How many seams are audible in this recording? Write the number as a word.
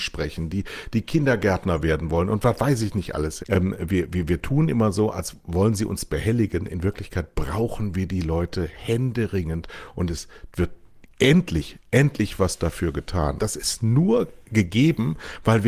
two